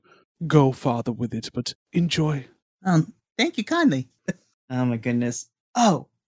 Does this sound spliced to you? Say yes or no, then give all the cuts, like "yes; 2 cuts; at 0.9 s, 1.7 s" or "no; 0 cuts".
yes; 1 cut; at 4.2 s